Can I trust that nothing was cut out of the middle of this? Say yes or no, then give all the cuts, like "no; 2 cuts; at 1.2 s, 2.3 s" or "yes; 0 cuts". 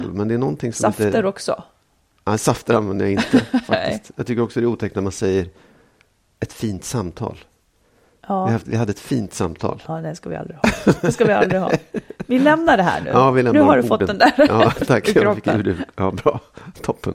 yes; 0 cuts